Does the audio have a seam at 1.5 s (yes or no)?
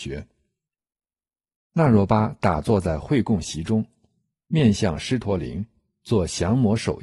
yes